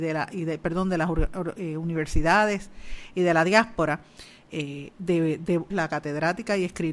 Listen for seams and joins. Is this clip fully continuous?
no; 1 cut; at 5.7 s

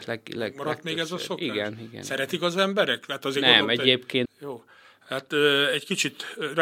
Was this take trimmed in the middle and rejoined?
yes; 1 cut; at 4.3 s

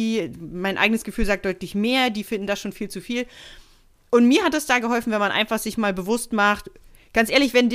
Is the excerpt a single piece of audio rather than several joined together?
yes; 0 cuts

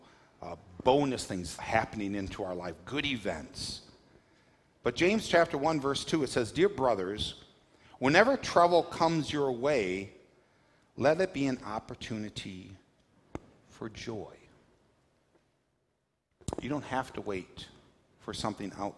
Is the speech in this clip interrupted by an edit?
yes; 1 cut; at 1.6 s

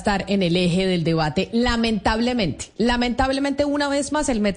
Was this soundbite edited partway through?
no; 0 cuts

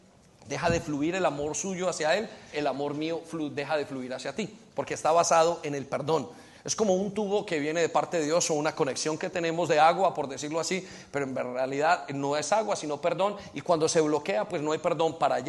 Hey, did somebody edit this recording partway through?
yes; 1 cut; at 2.5 s

